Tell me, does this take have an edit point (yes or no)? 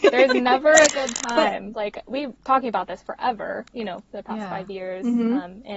yes